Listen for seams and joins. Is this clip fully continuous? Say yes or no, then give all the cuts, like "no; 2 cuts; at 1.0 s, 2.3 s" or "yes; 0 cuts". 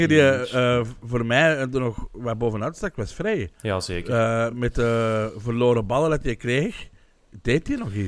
yes; 0 cuts